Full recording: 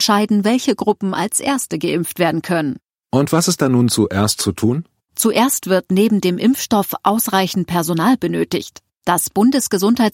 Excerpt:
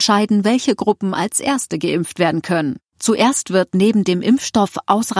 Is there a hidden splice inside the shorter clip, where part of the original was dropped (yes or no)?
yes